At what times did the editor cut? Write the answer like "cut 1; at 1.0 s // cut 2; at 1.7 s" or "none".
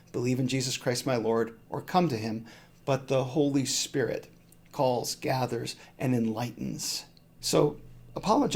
cut 1; at 7.4 s